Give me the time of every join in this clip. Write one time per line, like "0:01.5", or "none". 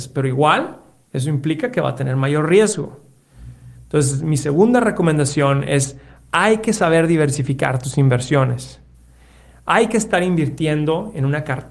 none